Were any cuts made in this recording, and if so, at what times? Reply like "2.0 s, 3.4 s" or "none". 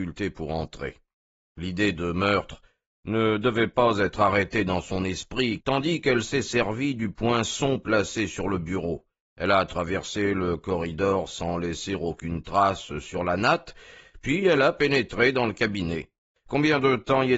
5.6 s